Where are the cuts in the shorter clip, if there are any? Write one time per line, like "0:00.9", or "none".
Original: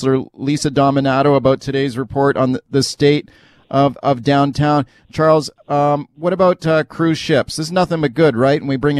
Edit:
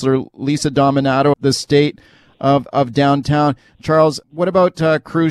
0:01.3
0:04.2